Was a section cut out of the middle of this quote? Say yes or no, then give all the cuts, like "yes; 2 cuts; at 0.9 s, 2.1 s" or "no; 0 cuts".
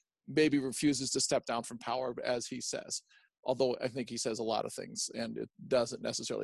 no; 0 cuts